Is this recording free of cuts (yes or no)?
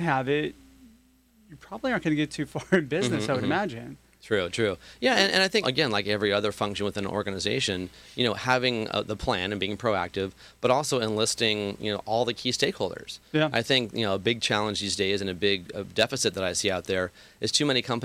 no